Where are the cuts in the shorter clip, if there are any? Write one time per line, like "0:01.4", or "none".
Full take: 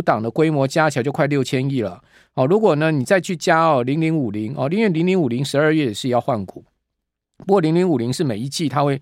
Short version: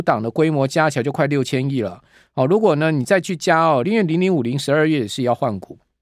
0:03.8